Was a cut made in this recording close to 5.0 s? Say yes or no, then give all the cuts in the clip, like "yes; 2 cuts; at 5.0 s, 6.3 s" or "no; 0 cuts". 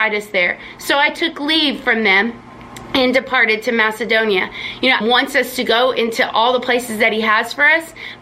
yes; 1 cut; at 5.0 s